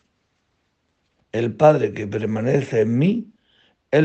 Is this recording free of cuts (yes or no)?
no